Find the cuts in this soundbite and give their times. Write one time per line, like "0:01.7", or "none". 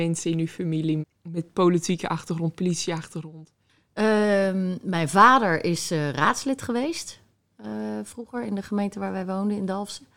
0:01.0